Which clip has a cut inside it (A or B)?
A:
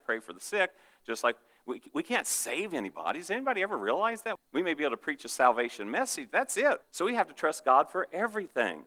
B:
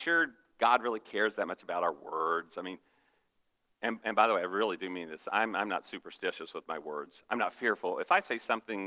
A